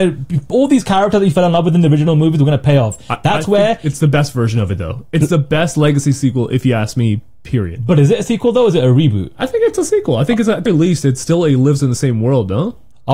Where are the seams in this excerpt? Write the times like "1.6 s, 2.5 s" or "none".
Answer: 10.7 s